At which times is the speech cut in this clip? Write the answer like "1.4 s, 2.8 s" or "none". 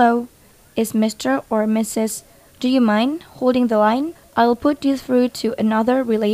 2.5 s